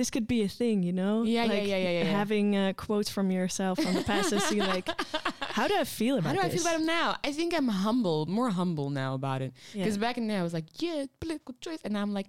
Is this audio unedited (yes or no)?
yes